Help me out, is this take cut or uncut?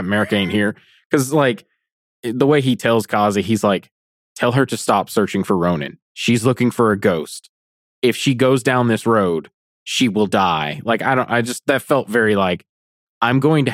uncut